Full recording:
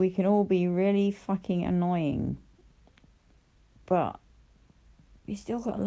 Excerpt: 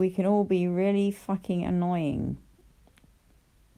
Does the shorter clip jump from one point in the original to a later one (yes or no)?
no